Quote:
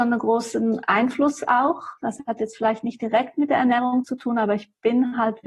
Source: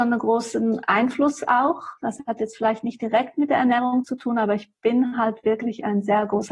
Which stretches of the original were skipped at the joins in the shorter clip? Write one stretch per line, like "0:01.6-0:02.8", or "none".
none

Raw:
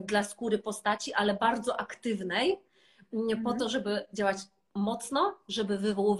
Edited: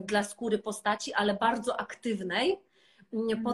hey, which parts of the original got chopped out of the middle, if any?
none

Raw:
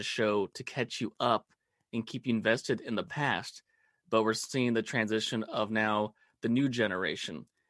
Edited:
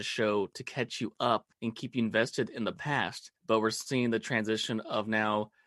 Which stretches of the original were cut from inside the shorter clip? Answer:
0:01.5-0:01.8
0:03.7-0:04.0

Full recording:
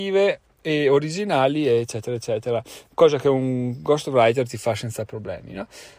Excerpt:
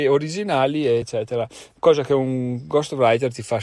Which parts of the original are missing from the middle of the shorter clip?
0:01.8-0:02.2

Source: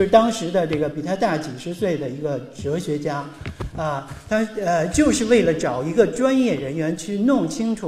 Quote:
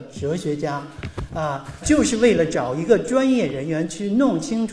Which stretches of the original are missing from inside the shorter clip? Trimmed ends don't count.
0:04.2-0:04.9

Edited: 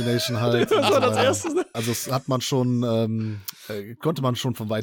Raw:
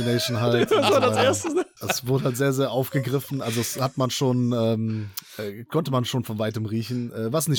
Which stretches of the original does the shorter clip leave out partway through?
0:01.7-0:03.4

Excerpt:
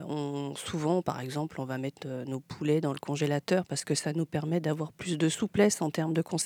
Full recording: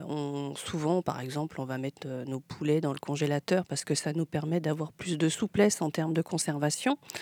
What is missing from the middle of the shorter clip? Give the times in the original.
none

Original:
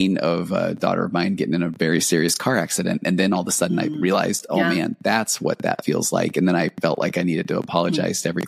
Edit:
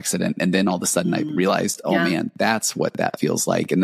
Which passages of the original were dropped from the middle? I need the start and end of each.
none

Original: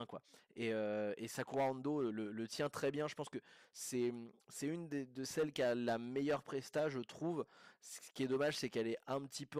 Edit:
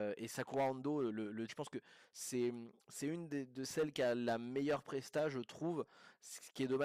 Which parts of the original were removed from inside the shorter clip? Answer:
0:02.5-0:03.1

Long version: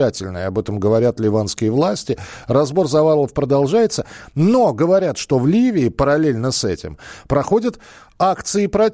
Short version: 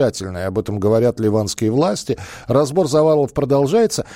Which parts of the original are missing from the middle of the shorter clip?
none

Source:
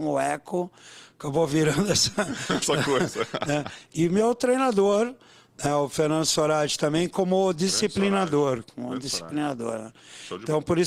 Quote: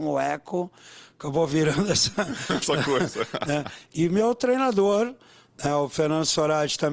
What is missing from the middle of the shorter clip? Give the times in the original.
none

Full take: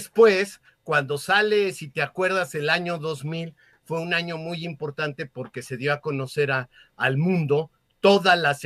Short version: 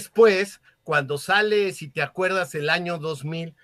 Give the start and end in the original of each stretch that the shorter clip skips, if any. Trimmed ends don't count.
none

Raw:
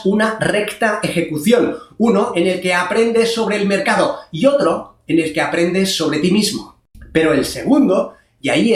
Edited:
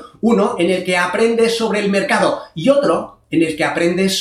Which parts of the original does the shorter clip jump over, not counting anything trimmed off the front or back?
none

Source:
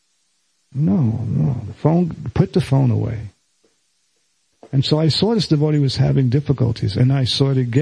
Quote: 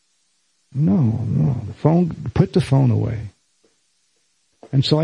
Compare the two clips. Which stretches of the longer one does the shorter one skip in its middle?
none

